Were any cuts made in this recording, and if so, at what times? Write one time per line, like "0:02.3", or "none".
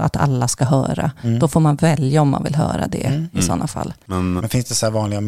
0:04.4